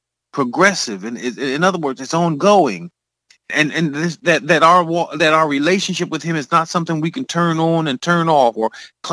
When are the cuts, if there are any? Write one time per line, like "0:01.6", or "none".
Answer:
0:03.5